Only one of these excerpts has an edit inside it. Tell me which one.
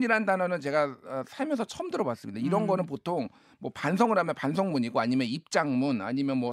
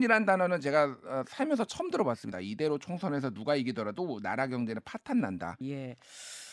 second; 2 cuts; at 2.3 s, 5.6 s

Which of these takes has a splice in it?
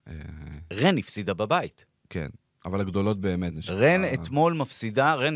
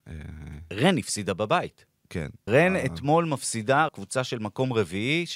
second; 2 cuts; at 2.5 s, 3.9 s

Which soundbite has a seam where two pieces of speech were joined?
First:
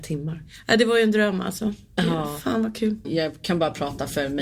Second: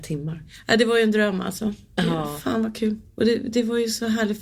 first; 1 cut; at 3.0 s

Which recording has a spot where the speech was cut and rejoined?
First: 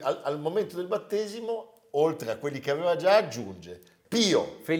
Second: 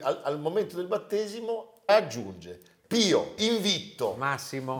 second; 2 cuts; at 1.9 s, 3.4 s

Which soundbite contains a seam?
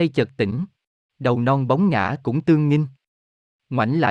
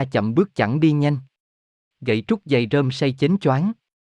first; 1 cut; at 1.1 s

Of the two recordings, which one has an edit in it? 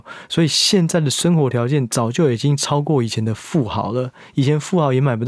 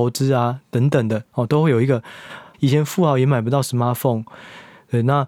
second; 1 cut; at 2.5 s

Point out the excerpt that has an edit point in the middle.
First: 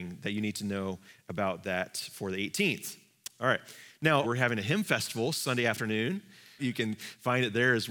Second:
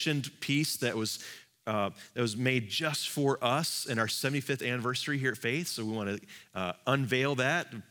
first; 2 cuts; at 4.2 s, 6.6 s

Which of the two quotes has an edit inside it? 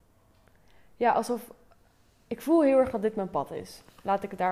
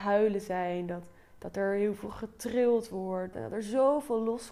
second; 1 cut; at 3.3 s

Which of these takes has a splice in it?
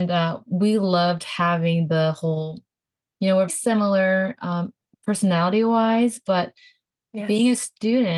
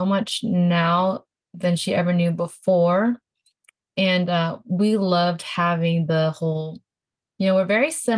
first; 1 cut; at 3.5 s

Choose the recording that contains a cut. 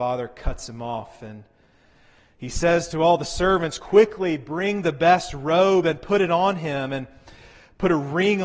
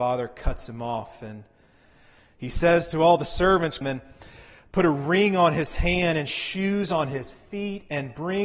second; 1 cut; at 3.8 s

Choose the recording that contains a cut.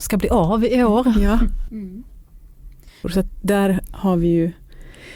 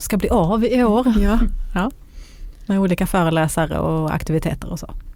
first; 2 cuts; at 1.7 s, 3.0 s

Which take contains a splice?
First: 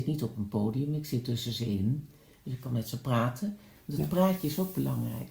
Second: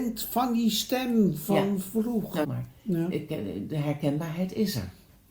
second; 1 cut; at 2.4 s

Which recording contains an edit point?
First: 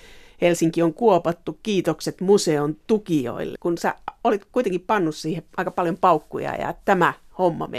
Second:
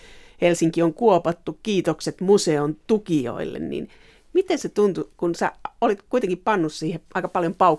first; 1 cut; at 3.6 s

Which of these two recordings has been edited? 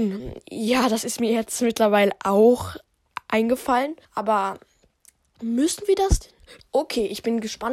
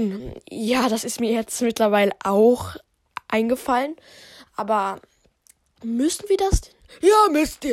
first; 2 cuts; at 4.0 s, 6.6 s

